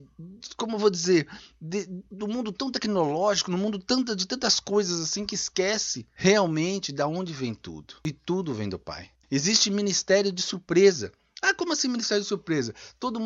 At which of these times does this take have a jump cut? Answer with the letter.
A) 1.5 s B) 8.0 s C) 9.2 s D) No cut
C